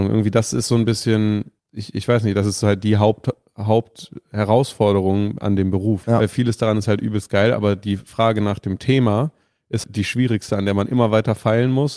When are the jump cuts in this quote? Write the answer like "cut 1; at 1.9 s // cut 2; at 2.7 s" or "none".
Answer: cut 1; at 1.6 s // cut 2; at 6.0 s // cut 3; at 9.8 s

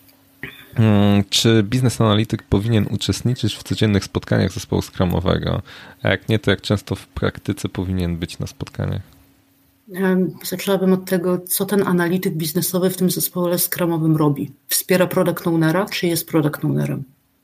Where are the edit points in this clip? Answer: none

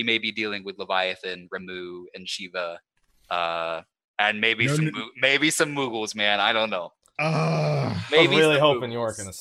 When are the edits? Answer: none

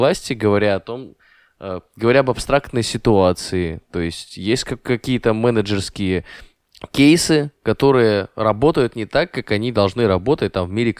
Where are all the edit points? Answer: none

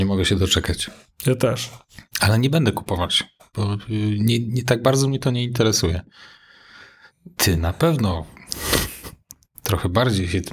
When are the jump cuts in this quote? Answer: none

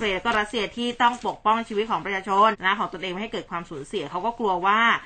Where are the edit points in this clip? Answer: cut 1; at 2.5 s

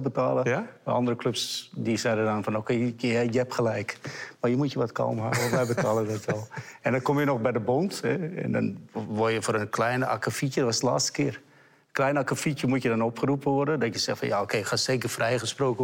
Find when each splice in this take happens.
none

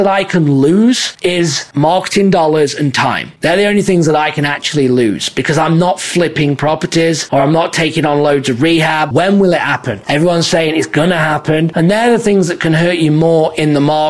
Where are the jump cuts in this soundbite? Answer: cut 1; at 9.1 s // cut 2; at 11.7 s

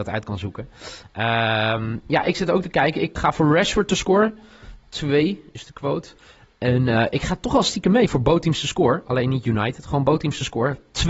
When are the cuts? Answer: cut 1; at 3.2 s

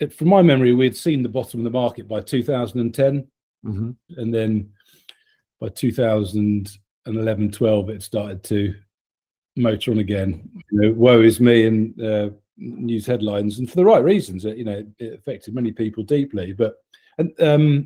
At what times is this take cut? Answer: cut 1; at 4.1 s // cut 2; at 10.6 s

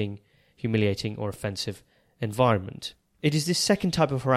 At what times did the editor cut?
none

